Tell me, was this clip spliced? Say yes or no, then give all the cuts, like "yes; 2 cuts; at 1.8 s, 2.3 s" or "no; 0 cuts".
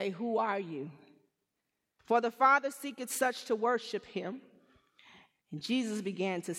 yes; 2 cuts; at 2.0 s, 5.4 s